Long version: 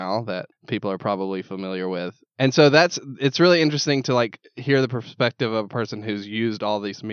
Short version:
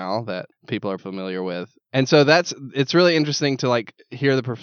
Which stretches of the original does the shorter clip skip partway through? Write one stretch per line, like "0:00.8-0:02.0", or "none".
0:01.0-0:01.4